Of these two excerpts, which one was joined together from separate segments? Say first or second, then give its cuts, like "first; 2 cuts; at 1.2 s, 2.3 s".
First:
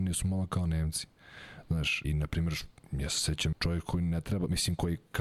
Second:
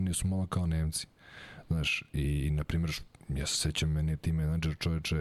first; 2 cuts; at 2.0 s, 3.5 s